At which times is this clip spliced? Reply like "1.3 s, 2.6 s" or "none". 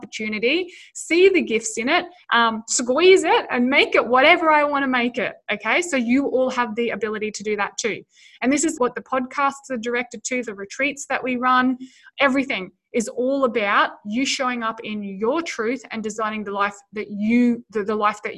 2.2 s, 8.8 s, 10.4 s